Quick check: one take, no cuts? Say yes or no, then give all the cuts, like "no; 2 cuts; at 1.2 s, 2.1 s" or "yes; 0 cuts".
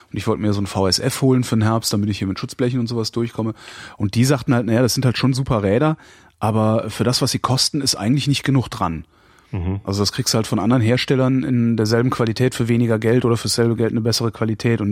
yes; 0 cuts